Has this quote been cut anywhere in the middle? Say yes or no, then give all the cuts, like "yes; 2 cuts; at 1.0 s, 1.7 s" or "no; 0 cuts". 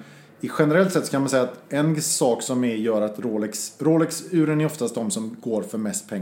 no; 0 cuts